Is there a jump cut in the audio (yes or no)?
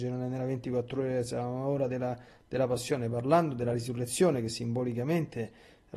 no